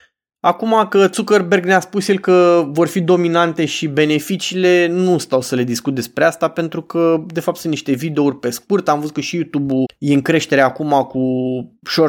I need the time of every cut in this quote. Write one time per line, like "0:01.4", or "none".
0:09.8